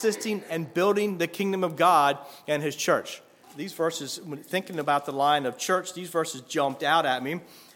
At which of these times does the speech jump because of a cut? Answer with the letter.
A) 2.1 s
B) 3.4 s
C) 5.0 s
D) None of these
B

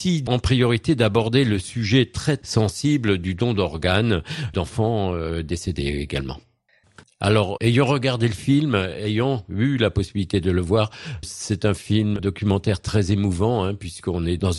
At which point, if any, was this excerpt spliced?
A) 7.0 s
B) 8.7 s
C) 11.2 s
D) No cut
A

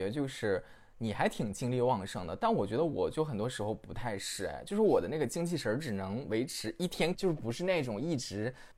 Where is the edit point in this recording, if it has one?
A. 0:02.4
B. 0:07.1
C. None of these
B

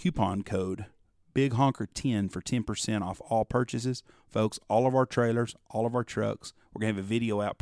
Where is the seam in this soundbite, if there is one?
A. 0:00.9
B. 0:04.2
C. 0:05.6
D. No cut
D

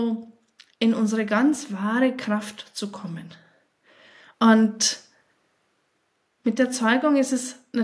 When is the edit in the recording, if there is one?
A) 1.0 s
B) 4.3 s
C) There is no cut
B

